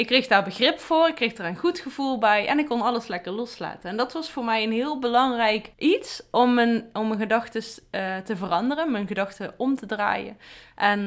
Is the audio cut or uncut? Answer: cut